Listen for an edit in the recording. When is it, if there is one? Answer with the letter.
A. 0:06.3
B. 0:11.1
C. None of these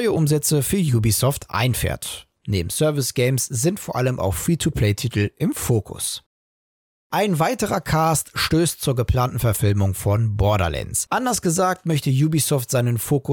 B